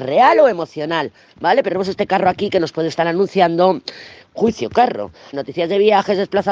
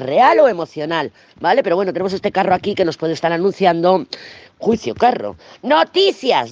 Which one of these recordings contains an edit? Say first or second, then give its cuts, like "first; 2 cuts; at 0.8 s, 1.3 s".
first; 2 cuts; at 1.7 s, 5.3 s